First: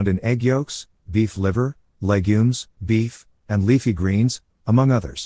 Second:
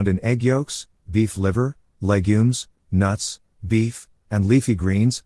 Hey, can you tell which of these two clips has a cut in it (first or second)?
first